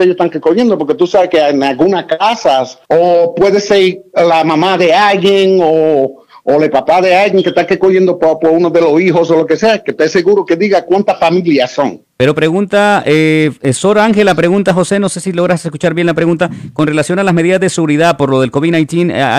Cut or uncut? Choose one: cut